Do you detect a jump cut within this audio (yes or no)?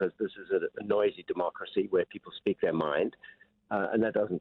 no